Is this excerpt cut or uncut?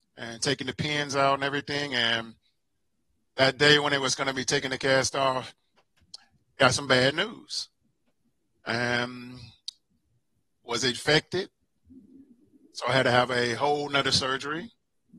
uncut